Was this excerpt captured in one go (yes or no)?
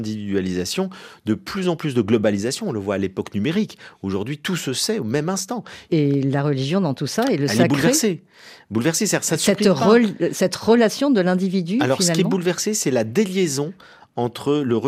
no